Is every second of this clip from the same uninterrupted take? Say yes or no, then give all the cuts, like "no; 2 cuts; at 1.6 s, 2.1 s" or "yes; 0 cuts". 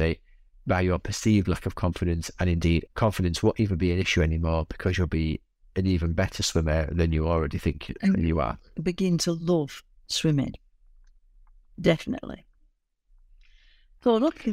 no; 1 cut; at 2.9 s